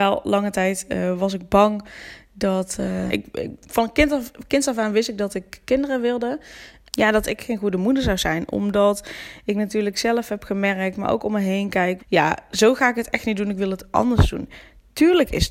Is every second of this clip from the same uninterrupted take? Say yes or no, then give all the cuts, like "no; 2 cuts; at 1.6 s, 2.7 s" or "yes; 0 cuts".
no; 3 cuts; at 3.1 s, 6.9 s, 12.0 s